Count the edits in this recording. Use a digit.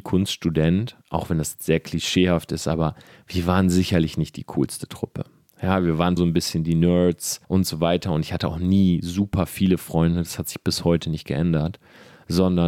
2